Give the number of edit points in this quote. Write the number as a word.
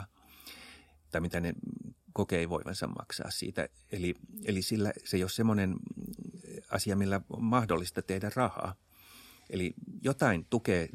zero